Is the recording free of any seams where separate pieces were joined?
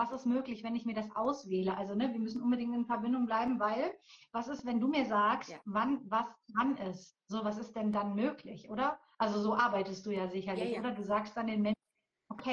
yes; 0 cuts

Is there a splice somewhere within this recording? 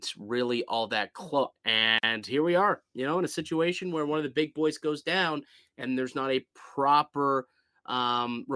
yes; 1 cut; at 1.5 s

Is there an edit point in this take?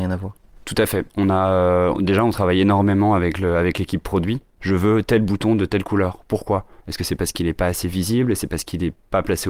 yes; 1 cut; at 4.6 s

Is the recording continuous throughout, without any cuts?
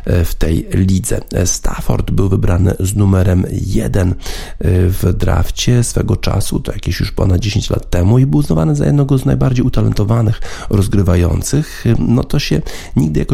yes; 0 cuts

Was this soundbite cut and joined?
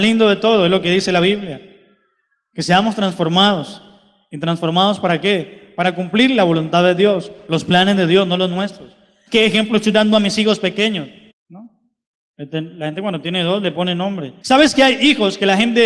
yes; 3 cuts; at 9.3 s, 11.3 s, 14.4 s

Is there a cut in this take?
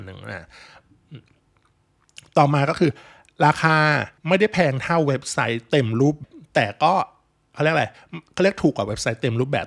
yes; 2 cuts; at 4.2 s, 6.2 s

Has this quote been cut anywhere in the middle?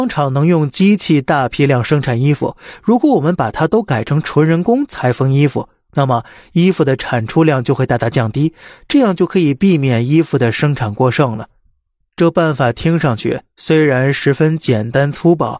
no; 0 cuts

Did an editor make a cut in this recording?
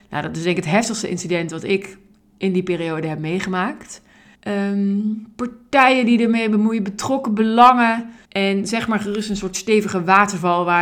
yes; 2 cuts; at 4.3 s, 8.2 s

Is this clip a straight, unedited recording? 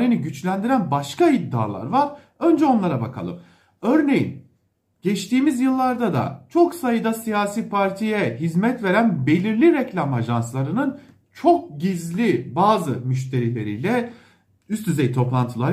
yes; 0 cuts

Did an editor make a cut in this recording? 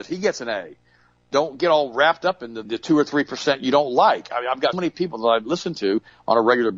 yes; 2 cuts; at 2.6 s, 4.7 s

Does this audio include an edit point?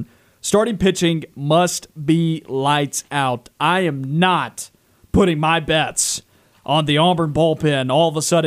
no; 0 cuts

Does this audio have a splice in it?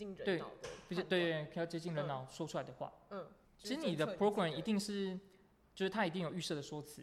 yes; 1 cut; at 3.4 s

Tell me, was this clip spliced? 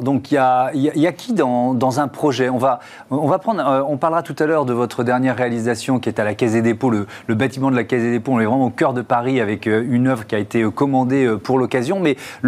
no; 0 cuts

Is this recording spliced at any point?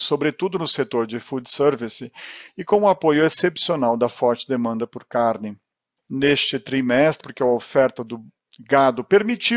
yes; 2 cuts; at 6.0 s, 7.2 s

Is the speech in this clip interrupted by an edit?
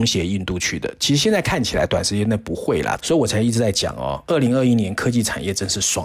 yes; 1 cut; at 3.0 s

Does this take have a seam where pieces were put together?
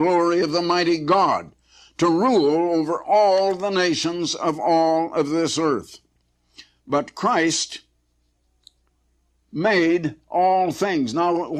no; 0 cuts

